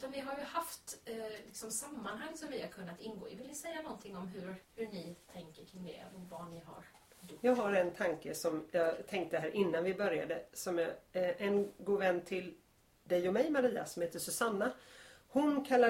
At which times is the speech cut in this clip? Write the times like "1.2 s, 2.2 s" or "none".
4.6 s